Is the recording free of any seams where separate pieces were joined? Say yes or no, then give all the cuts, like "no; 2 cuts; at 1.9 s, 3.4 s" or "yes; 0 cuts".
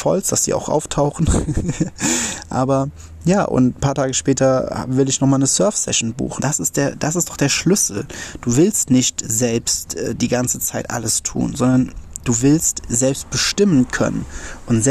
no; 1 cut; at 6.4 s